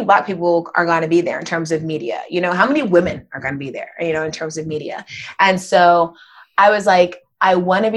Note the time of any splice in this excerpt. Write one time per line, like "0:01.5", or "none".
none

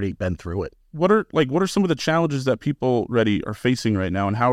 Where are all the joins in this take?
0:03.4

